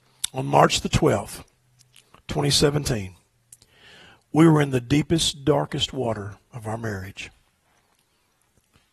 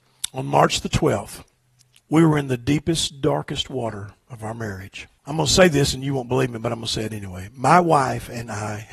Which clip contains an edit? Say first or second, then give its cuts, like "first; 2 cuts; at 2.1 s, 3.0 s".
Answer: second; 2 cuts; at 2.0 s, 5.2 s